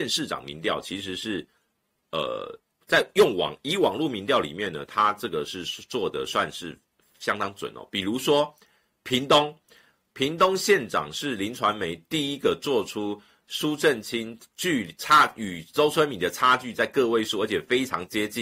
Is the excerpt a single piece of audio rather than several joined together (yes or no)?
yes